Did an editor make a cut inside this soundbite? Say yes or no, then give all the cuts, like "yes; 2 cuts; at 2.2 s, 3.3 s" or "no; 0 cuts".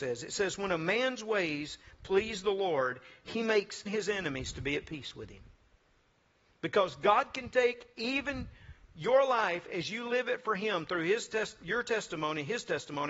yes; 1 cut; at 3.9 s